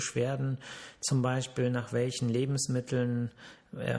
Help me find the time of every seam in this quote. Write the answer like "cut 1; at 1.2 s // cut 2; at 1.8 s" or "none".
none